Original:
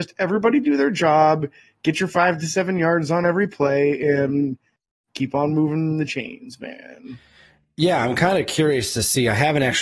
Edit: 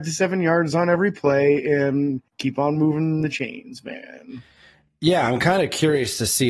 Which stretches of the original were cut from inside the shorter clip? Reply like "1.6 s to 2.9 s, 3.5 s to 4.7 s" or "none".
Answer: 4.6 s to 5.0 s